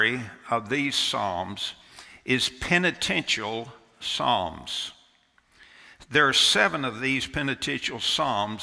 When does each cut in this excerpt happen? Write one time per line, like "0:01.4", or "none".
none